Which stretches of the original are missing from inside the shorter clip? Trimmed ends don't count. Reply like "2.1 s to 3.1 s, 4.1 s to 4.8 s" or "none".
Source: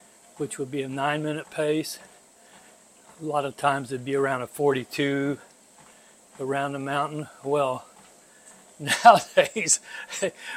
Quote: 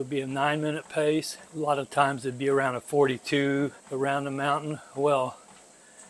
2.1 s to 3.1 s, 5.5 s to 6.3 s